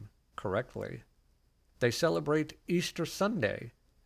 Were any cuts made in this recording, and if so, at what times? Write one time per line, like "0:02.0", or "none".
none